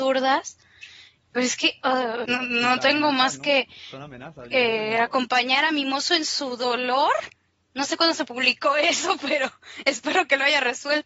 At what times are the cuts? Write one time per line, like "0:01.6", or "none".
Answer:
0:02.2